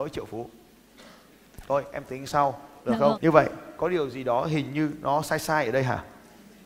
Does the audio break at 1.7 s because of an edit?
no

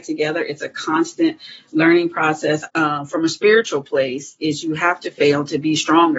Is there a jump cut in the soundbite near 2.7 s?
yes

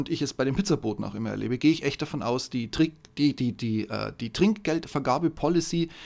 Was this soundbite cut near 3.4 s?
no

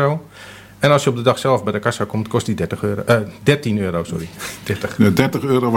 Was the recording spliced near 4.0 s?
no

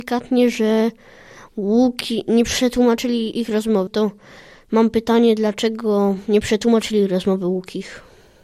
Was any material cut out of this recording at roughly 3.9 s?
yes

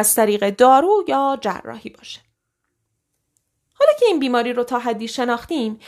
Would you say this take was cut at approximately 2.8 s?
no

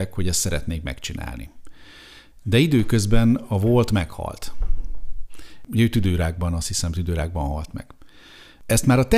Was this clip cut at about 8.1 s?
no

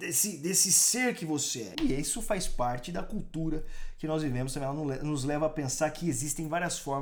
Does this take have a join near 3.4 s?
no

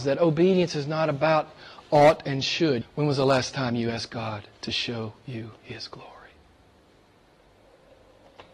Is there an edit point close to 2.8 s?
yes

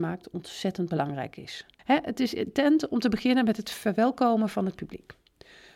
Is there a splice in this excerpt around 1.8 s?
yes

